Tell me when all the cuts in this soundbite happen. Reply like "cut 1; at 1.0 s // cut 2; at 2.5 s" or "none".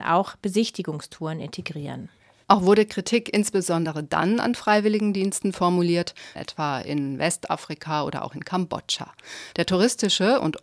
cut 1; at 2.4 s // cut 2; at 6.3 s // cut 3; at 9.5 s